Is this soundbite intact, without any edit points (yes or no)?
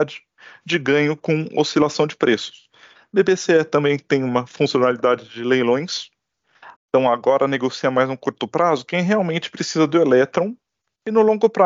no